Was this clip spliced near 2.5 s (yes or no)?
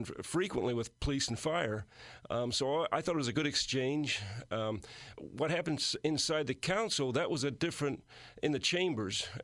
no